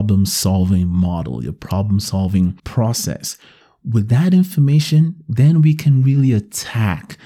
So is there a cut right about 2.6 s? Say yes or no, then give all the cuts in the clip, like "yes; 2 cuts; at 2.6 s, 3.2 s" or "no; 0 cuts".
yes; 1 cut; at 2.6 s